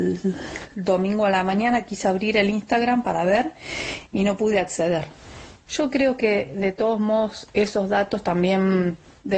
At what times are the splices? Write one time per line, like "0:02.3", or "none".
0:05.7
0:07.5